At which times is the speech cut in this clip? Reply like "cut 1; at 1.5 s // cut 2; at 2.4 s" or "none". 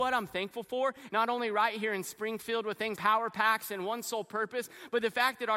cut 1; at 1.1 s // cut 2; at 3.0 s